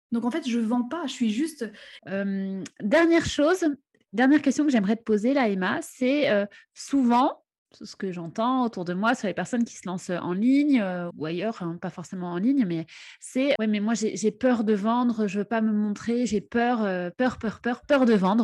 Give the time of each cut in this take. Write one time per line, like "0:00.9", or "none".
0:02.0
0:11.1
0:13.6